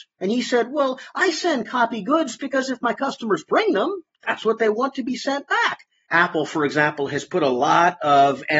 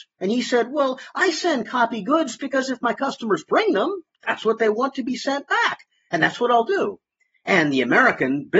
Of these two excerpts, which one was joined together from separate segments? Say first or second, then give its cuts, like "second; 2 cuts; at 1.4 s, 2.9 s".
first; 1 cut; at 6.1 s